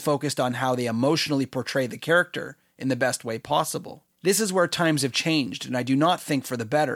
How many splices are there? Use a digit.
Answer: 1